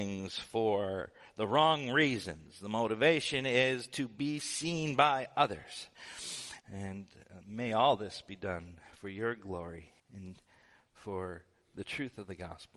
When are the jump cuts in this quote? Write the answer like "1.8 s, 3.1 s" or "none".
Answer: 6.6 s, 10.0 s

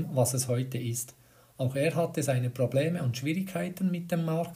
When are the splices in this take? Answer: none

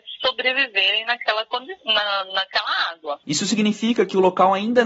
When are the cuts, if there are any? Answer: 3.2 s

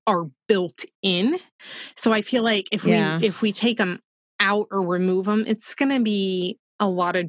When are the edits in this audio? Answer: none

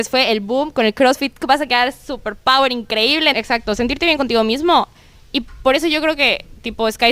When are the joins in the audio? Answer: 1.4 s, 3.3 s

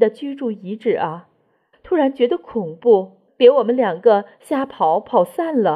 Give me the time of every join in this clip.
1.7 s

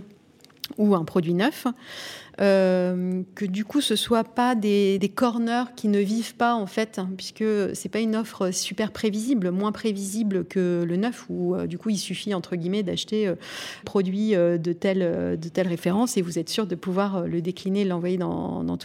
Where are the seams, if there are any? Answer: 5.0 s, 13.8 s

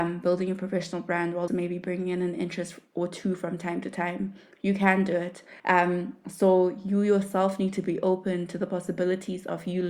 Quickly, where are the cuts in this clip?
1.5 s, 5.6 s

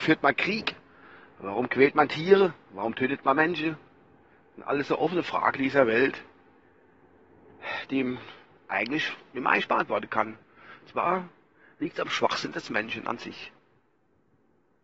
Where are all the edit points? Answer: none

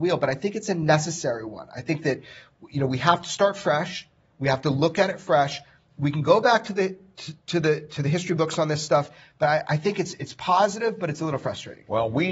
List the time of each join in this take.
none

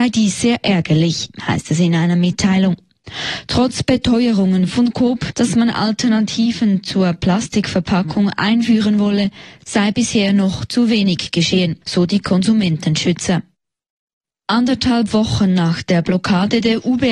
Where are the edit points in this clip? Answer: 5.3 s

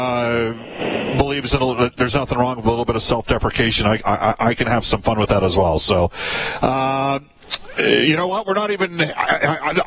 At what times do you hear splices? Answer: none

